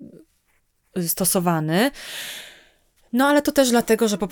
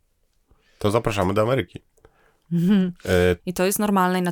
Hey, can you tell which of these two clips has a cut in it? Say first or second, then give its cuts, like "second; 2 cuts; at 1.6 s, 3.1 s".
second; 1 cut; at 3.4 s